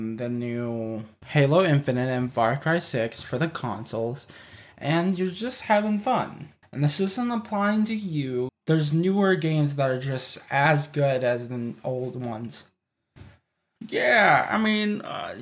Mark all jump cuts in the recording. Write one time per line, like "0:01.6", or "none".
0:06.6
0:08.5
0:13.8